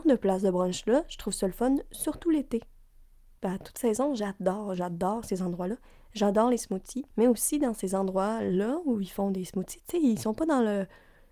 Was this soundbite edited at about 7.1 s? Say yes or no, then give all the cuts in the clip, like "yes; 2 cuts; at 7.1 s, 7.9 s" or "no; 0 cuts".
yes; 1 cut; at 7.1 s